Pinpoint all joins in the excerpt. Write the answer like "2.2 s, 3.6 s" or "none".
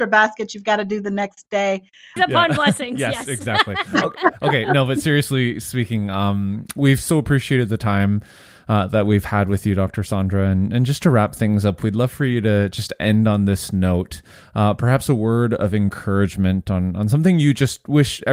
2.2 s